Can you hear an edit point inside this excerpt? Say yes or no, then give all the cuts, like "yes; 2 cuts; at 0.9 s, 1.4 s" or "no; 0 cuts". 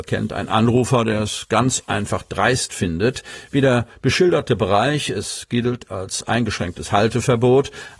no; 0 cuts